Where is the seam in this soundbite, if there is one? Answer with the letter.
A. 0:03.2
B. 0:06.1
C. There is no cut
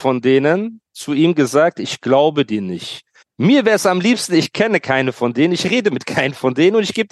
A